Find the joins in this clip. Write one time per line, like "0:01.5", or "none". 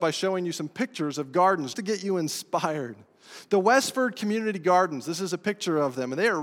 0:01.7